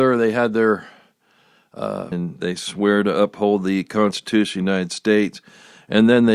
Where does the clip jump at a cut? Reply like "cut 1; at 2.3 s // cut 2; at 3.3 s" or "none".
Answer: cut 1; at 2.1 s